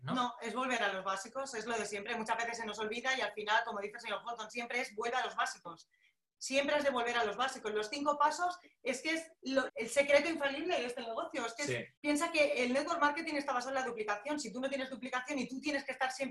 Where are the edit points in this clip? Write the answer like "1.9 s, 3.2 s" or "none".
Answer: 9.7 s, 12.0 s

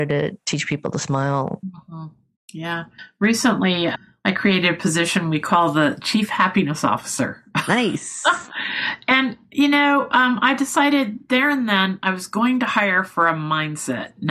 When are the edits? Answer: none

